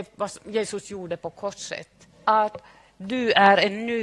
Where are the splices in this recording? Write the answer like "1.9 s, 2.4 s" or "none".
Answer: 2.1 s